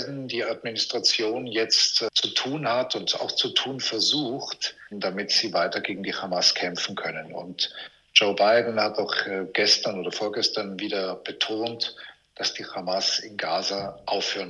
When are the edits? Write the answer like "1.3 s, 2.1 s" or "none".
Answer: 4.9 s